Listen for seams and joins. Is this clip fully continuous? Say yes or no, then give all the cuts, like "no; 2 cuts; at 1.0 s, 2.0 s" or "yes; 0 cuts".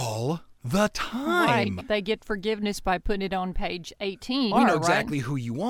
no; 2 cuts; at 1.8 s, 4.5 s